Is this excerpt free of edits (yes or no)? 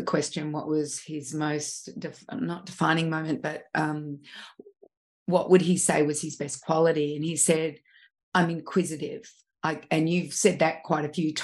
yes